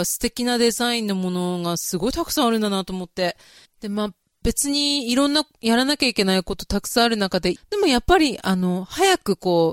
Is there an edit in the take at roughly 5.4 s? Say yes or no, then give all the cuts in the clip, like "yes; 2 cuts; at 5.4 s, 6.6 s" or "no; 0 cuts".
no; 2 cuts; at 3.6 s, 7.6 s